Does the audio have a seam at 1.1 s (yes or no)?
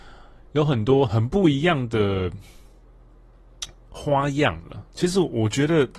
yes